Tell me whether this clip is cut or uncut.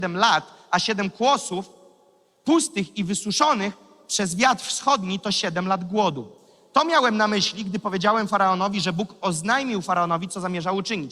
uncut